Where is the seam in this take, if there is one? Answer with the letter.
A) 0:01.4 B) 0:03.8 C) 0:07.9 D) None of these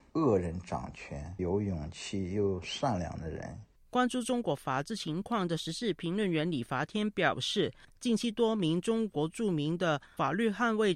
A